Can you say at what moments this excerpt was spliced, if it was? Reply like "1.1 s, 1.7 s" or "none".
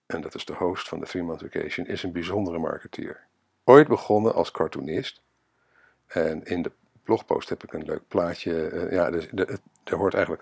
none

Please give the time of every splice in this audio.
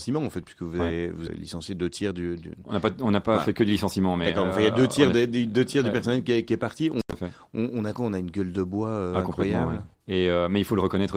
1.3 s, 9.9 s

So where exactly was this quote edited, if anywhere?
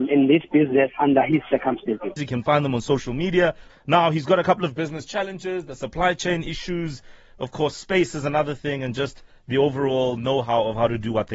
2.2 s, 3.7 s

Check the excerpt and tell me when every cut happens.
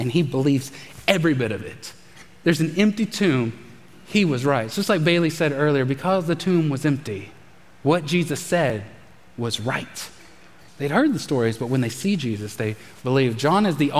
10.7 s

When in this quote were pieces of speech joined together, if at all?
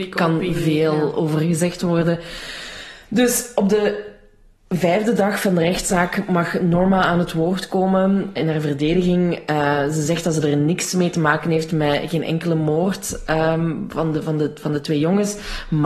8.4 s

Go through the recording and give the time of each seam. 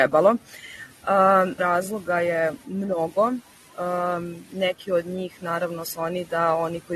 1.6 s

